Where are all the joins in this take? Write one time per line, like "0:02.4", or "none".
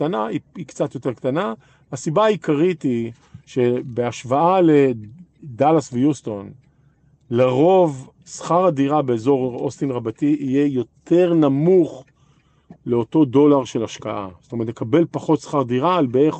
0:12.8